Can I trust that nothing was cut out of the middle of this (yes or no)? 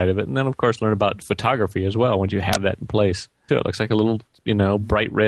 no